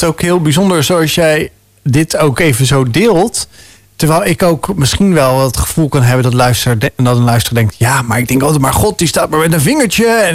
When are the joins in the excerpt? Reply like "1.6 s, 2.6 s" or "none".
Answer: none